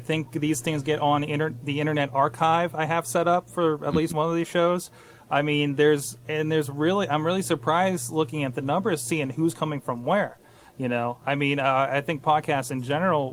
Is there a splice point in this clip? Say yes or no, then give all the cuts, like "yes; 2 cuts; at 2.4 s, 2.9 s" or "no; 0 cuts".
yes; 1 cut; at 4.1 s